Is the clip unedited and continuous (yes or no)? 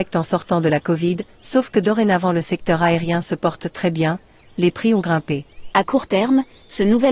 no